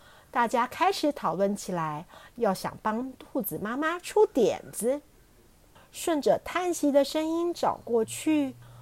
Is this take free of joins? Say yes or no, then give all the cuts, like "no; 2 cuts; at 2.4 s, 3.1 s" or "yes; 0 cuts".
no; 1 cut; at 5.8 s